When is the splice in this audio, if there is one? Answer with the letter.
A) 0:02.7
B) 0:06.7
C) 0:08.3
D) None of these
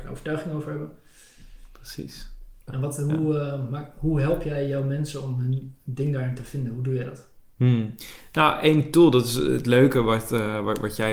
A